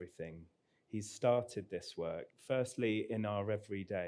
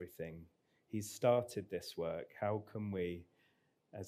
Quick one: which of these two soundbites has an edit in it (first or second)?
first